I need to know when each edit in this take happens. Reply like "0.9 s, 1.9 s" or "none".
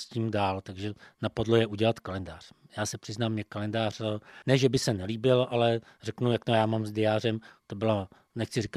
7.6 s